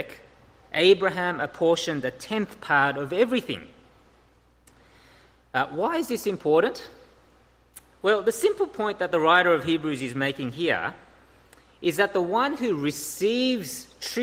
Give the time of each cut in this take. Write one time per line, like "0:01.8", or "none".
none